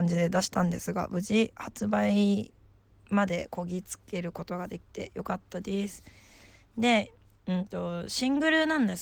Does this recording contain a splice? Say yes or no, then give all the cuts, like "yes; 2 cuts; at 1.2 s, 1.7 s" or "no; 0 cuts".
no; 0 cuts